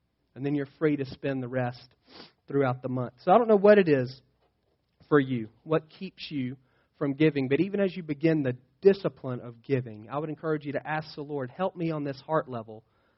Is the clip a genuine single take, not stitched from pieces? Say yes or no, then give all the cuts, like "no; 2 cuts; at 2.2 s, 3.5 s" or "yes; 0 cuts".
yes; 0 cuts